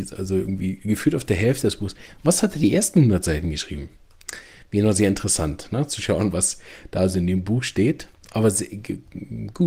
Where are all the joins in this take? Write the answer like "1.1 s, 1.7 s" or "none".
none